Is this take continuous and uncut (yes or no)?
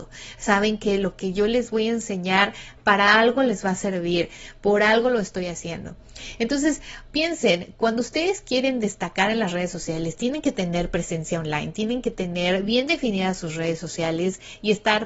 yes